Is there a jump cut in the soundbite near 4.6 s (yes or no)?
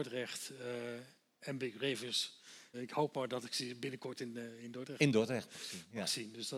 no